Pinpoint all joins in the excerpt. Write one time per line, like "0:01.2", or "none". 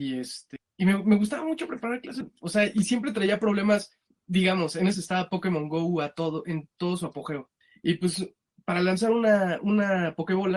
0:04.9